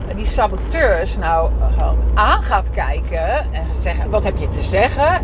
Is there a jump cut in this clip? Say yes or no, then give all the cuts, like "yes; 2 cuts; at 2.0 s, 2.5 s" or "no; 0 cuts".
yes; 1 cut; at 4.1 s